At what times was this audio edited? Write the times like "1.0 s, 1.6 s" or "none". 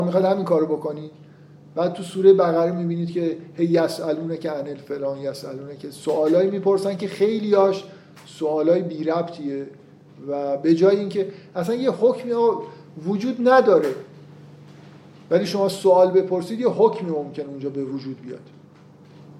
none